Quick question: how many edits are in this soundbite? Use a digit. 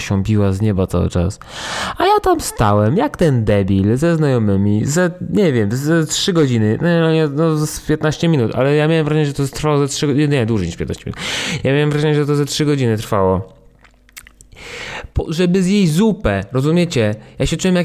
0